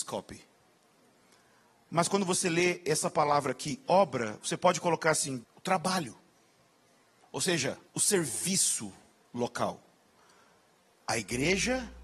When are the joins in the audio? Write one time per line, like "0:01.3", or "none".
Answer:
0:05.4
0:07.9